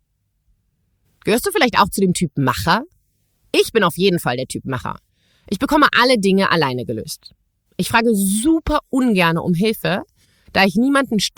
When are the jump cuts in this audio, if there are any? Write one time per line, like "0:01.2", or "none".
none